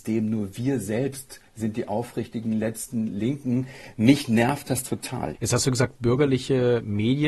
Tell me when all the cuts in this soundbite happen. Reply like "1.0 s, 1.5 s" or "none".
1.5 s, 5.3 s